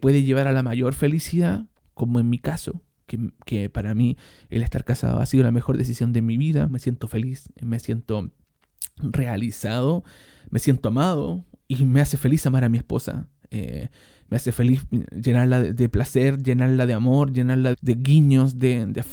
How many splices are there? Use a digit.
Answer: 2